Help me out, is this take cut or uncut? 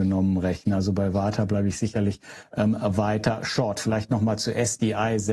uncut